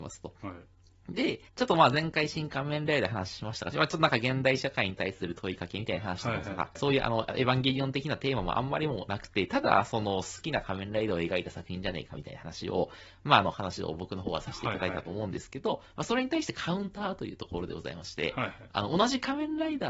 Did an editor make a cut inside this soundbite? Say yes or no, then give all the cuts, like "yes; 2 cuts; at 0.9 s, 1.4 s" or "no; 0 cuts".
yes; 3 cuts; at 1.5 s, 3.7 s, 6.8 s